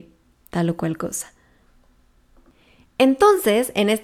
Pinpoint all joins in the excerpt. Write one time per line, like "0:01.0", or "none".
none